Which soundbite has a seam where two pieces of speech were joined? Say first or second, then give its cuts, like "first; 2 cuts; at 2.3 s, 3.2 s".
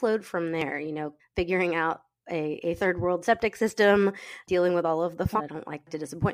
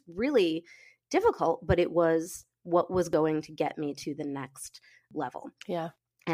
first; 2 cuts; at 1.2 s, 5.4 s